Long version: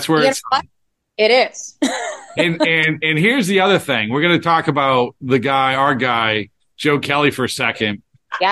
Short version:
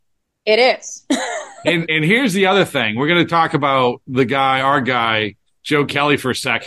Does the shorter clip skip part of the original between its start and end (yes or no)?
yes